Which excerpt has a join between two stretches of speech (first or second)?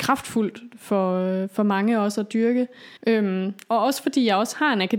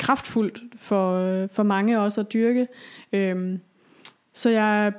first